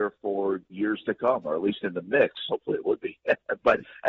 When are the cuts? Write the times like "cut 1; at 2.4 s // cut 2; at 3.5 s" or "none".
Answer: cut 1; at 2.5 s